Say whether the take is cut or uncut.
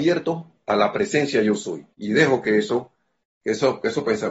cut